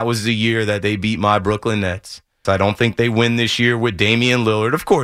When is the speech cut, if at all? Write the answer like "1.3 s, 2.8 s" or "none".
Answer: 2.4 s

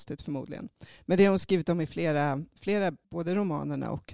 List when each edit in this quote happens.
3.0 s

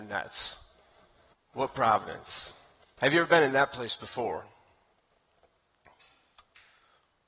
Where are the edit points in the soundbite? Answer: 1.3 s, 3.0 s

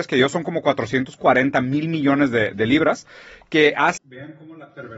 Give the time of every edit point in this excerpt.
2.5 s, 4.0 s

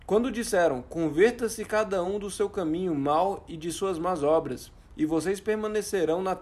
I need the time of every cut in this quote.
none

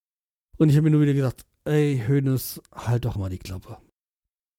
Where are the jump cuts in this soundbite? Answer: 3.2 s

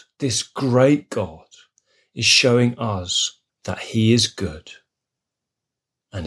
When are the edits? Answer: 3.5 s

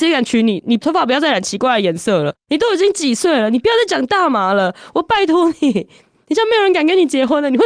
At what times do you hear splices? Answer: none

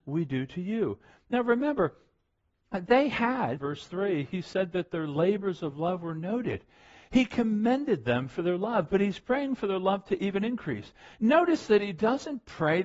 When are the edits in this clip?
3.6 s

